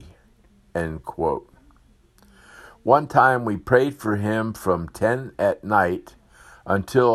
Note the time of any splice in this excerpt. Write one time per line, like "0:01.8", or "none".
none